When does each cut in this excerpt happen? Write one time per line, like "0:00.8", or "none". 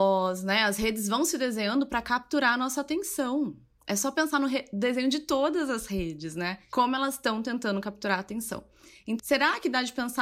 0:09.2